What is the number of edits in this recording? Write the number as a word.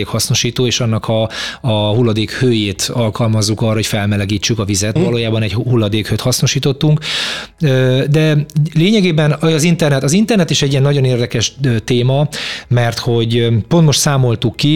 one